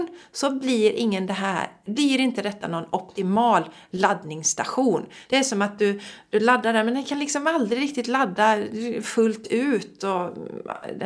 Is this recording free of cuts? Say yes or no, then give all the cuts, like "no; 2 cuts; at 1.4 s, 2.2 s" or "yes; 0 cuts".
no; 1 cut; at 5.3 s